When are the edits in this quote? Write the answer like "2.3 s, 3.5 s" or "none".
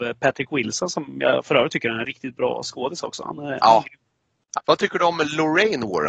4.5 s